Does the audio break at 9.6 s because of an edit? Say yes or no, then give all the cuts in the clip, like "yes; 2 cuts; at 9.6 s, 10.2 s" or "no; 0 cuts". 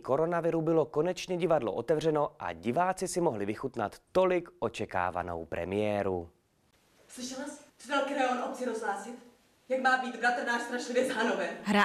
no; 1 cut; at 7.7 s